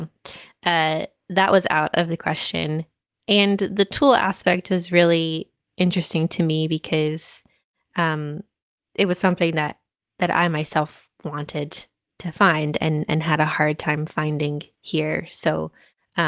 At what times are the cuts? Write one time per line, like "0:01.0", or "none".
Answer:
none